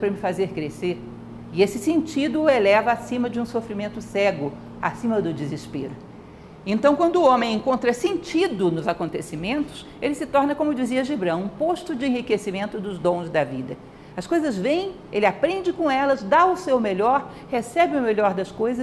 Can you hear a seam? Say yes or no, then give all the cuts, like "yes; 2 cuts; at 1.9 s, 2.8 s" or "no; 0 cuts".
no; 0 cuts